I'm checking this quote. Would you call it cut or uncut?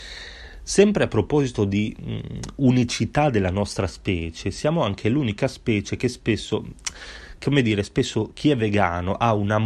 uncut